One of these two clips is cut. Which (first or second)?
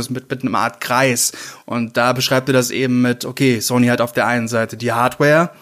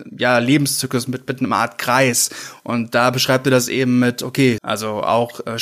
second